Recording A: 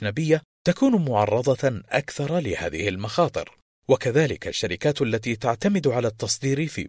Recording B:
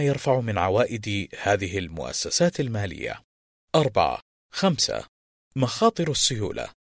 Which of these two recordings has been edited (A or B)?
B